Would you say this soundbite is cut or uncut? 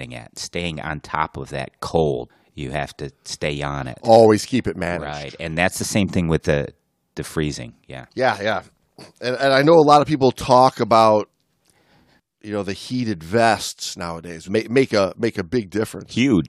cut